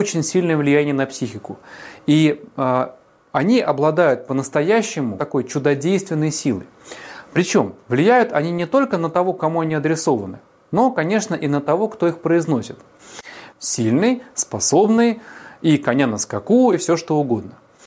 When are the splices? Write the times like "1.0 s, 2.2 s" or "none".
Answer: 5.2 s, 13.5 s, 16.7 s